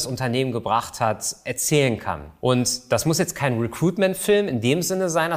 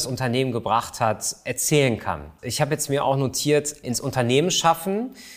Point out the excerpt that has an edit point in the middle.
second; 2 cuts; at 2.4 s, 3.8 s

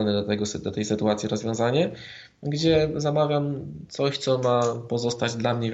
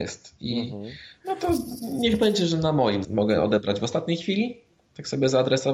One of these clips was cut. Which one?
second; 2 cuts; at 1.2 s, 3.0 s

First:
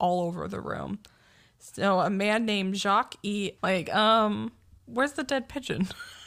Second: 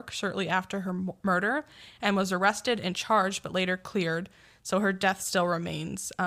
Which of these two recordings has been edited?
first; 1 cut; at 3.6 s

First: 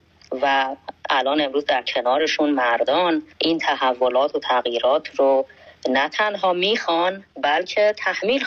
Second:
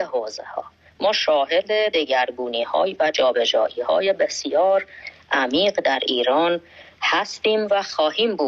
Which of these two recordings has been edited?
first; 1 cut; at 3.3 s

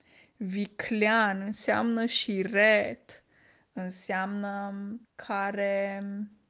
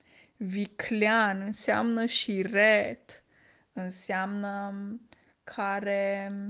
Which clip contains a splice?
first; 1 cut; at 5.0 s

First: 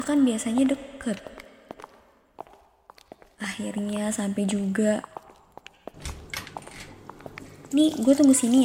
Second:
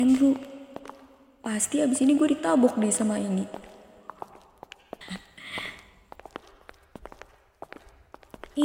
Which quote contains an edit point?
second; 1 cut; at 5.0 s

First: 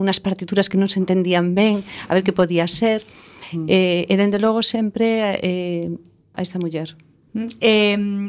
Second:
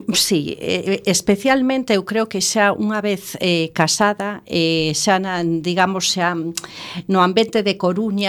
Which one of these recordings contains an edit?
first; 1 cut; at 6.3 s

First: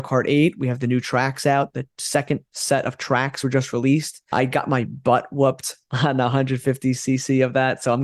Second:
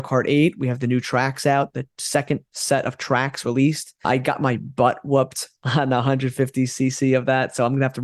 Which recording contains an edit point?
second; 1 cut; at 3.4 s

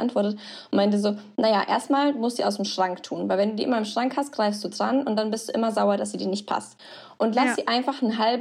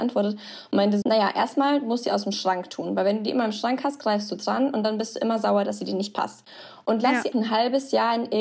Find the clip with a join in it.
second; 2 cuts; at 1.0 s, 7.3 s

